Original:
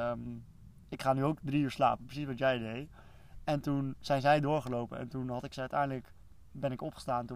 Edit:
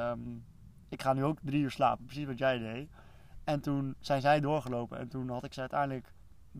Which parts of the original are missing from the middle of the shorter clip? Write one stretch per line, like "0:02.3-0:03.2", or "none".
none